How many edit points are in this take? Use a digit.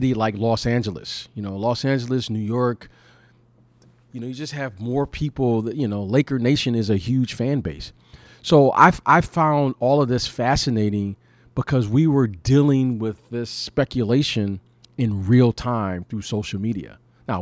0